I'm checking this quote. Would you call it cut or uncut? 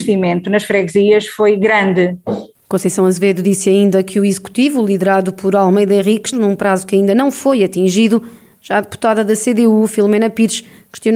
cut